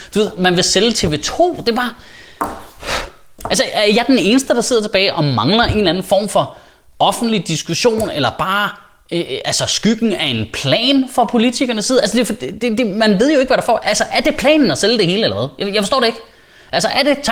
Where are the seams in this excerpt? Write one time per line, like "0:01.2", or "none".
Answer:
none